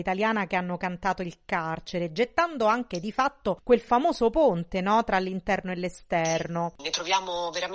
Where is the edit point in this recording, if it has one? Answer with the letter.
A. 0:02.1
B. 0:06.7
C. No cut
C